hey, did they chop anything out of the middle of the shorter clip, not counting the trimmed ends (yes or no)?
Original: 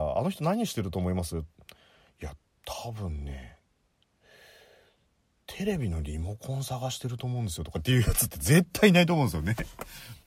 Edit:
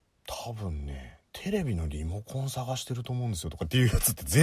yes